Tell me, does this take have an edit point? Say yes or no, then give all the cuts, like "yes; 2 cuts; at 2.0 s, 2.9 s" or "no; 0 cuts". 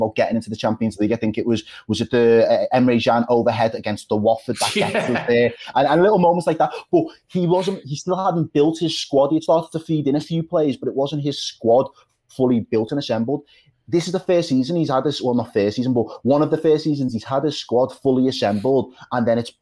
no; 0 cuts